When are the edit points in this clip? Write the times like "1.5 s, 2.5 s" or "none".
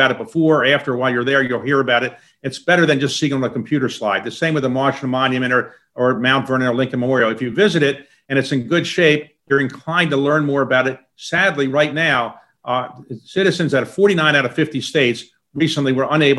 11.1 s